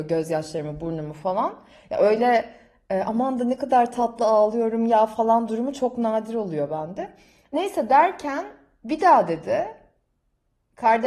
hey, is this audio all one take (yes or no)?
yes